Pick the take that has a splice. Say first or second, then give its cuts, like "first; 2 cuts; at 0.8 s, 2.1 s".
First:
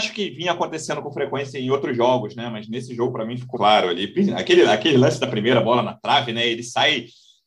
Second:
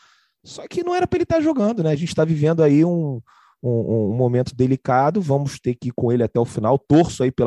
first; 1 cut; at 3.5 s